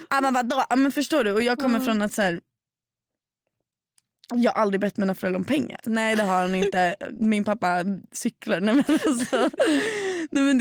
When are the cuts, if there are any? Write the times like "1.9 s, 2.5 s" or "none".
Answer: 5.8 s

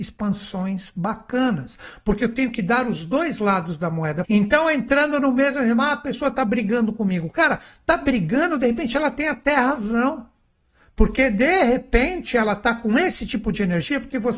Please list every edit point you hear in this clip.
4.2 s

